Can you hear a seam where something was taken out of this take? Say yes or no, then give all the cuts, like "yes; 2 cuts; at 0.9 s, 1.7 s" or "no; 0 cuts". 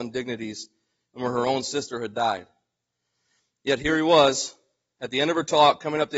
no; 0 cuts